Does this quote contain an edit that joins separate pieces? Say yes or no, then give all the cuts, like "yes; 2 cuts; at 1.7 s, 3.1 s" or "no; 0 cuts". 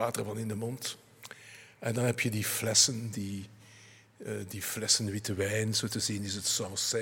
no; 0 cuts